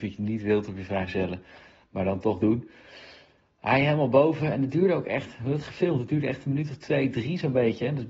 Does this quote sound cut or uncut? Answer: uncut